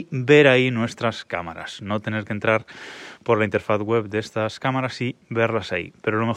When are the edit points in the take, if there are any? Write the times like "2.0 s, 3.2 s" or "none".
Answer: none